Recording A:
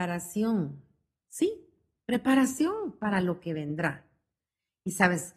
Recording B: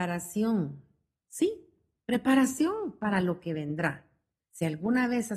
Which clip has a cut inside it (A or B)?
B